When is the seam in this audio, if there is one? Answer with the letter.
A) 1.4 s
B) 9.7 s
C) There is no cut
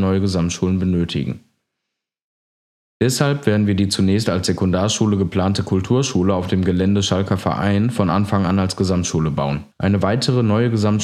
B